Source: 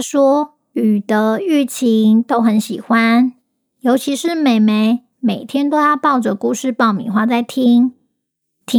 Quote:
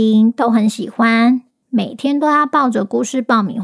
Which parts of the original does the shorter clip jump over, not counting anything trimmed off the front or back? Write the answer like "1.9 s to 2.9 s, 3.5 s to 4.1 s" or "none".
3.5 s to 5.1 s